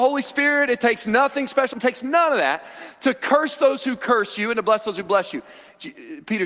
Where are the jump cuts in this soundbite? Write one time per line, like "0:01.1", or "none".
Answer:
0:01.7

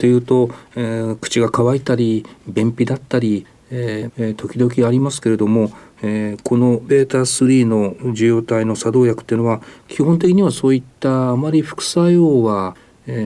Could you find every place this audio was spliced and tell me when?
0:04.1

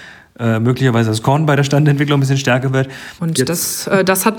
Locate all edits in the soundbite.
0:03.2

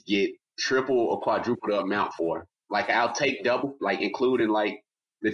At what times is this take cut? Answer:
0:03.8

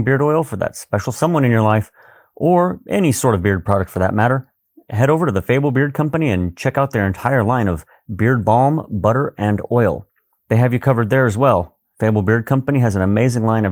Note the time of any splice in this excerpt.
0:10.4

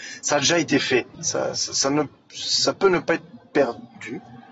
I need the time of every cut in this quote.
0:01.1

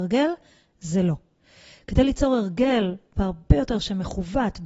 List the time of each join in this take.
none

